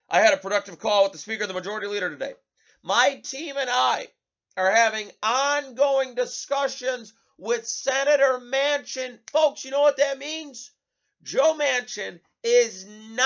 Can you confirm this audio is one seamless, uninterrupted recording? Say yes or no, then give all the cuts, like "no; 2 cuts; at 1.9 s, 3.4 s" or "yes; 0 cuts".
yes; 0 cuts